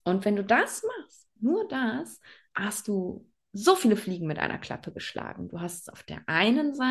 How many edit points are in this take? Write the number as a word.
zero